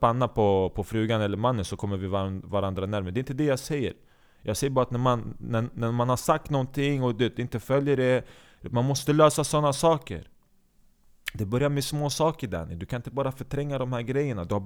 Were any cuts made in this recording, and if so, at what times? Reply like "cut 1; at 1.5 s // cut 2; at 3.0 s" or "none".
none

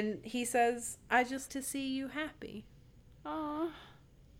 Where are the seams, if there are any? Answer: cut 1; at 1.5 s

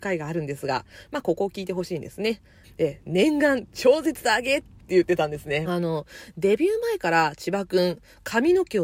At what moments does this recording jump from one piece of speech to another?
cut 1; at 2.6 s // cut 2; at 5.6 s

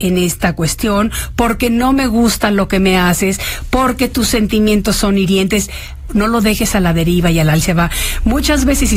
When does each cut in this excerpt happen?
cut 1; at 6.1 s

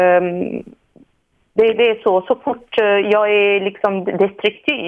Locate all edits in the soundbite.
cut 1; at 1.8 s

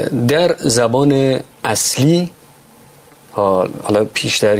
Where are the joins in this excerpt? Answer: cut 1; at 1.5 s

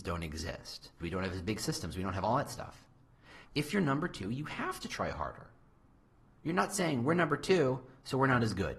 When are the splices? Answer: cut 1; at 1.0 s // cut 2; at 3.4 s

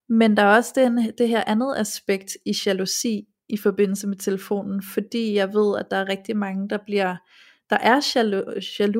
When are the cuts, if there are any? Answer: none

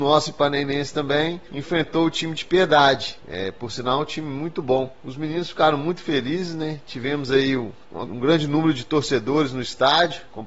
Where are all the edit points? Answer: cut 1; at 3.2 s // cut 2; at 8.1 s

